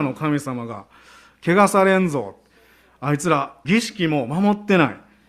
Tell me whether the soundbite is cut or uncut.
cut